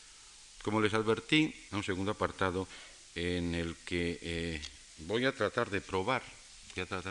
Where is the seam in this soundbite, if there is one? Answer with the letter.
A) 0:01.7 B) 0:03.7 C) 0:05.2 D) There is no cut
A